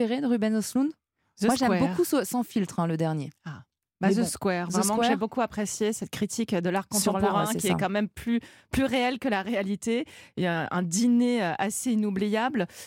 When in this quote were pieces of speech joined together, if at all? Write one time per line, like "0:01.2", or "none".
none